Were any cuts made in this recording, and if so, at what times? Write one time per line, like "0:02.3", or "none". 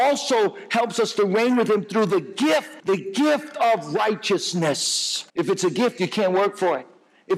0:02.8
0:05.3